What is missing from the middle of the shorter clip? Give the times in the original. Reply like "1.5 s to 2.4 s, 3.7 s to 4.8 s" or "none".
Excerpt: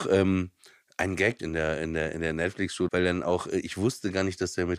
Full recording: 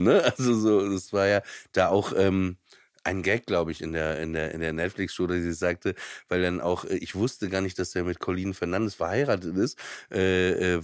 3.5 s to 3.8 s, 5.3 s to 6.3 s

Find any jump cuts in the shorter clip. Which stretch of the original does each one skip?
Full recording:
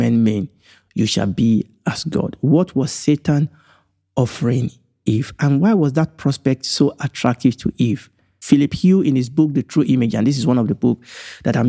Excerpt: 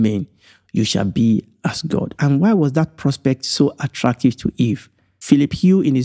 2.4 s to 5.4 s

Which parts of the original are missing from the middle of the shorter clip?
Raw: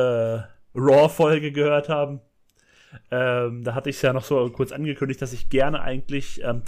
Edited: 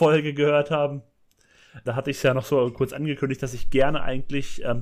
3.0 s to 3.6 s

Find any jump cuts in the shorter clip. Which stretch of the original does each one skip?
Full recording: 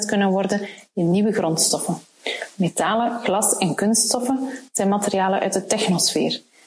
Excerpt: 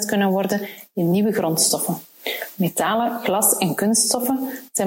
none

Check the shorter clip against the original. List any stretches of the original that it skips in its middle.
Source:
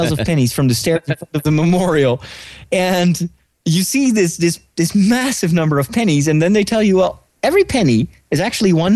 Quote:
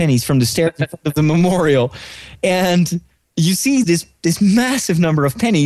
4.1 s to 4.4 s

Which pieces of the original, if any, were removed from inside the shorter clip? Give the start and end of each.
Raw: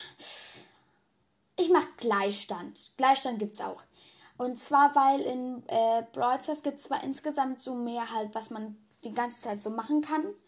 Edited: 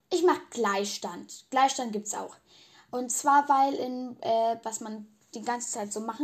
6.1 s to 8.3 s

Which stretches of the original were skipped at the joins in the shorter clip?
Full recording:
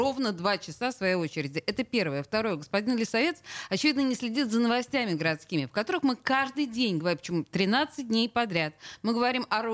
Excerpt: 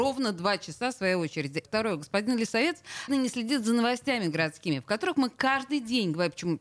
1.6 s to 2.2 s, 3.7 s to 3.9 s

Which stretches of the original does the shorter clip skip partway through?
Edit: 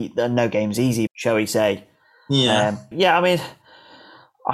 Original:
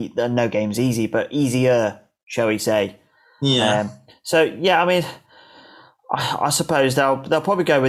1.1 s to 2.2 s, 4.0 s to 4.6 s

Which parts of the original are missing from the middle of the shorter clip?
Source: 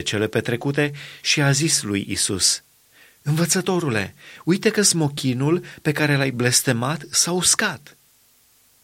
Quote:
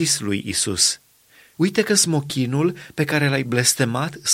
3.2 s to 4.4 s

